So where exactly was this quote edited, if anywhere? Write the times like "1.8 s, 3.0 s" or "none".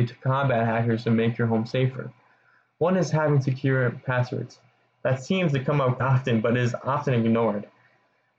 6.0 s